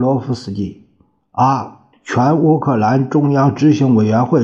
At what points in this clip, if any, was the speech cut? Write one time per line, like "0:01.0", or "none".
0:01.9